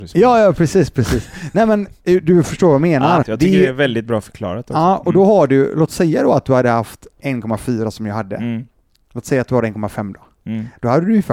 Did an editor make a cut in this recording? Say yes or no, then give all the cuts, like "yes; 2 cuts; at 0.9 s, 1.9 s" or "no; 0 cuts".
yes; 1 cut; at 3.2 s